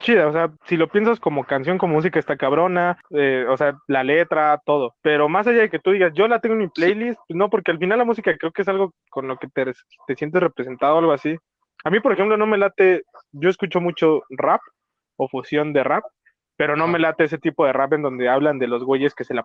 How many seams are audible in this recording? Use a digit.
0